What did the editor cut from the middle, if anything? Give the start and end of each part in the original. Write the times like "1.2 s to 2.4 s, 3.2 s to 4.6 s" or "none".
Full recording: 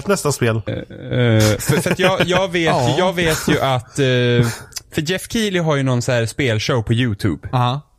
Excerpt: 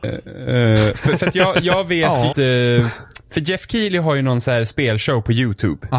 3.0 s to 3.9 s

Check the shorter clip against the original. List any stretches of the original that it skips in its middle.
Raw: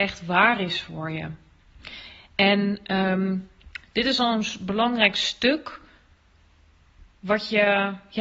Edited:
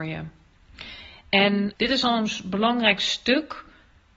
2.8 s to 3.9 s

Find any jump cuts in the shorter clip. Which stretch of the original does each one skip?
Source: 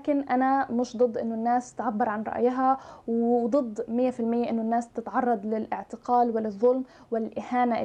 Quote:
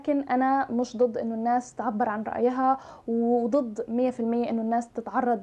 none

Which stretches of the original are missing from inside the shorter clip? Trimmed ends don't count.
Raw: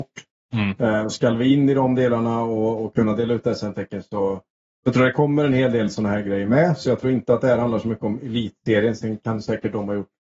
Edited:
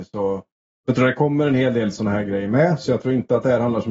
none

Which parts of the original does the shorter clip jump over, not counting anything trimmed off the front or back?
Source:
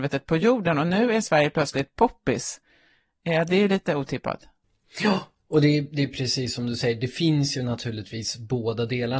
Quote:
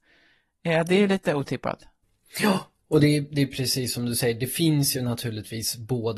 none

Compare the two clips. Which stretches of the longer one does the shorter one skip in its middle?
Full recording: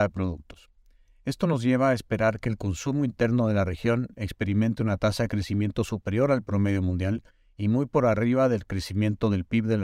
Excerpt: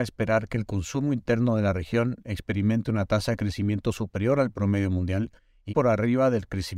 7.6 s to 7.9 s

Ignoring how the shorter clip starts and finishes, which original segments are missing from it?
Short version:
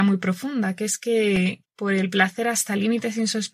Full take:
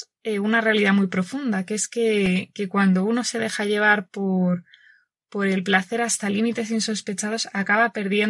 2.5 s to 5.2 s

